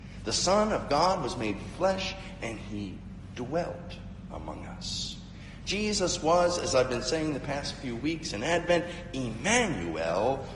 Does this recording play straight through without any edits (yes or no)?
yes